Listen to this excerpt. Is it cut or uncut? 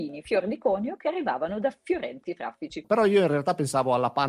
cut